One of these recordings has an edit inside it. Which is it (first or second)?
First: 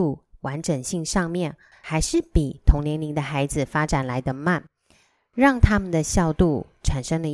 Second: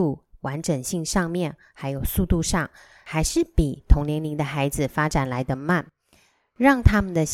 first